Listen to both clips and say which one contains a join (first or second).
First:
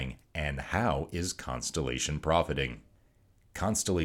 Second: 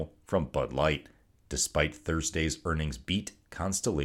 second